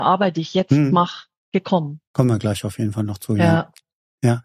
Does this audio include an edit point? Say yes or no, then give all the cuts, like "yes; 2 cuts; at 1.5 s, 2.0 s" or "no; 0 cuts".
yes; 1 cut; at 2.1 s